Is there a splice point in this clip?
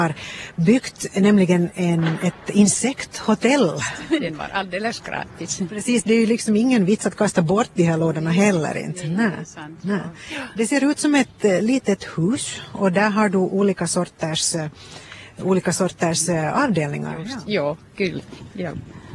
yes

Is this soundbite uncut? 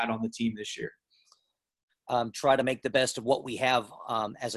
no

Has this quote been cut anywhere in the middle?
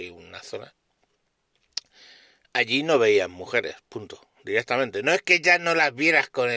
no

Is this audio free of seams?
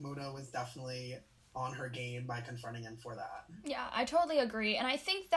yes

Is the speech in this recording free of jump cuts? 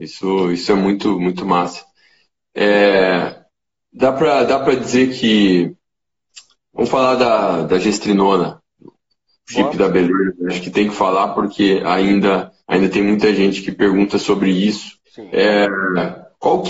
no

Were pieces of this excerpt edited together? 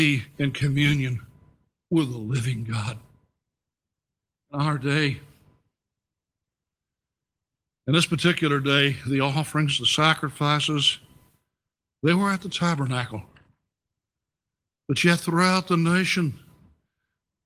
no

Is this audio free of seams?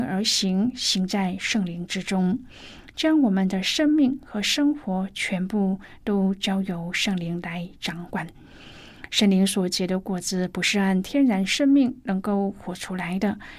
yes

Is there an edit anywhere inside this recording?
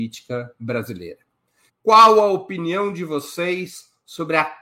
yes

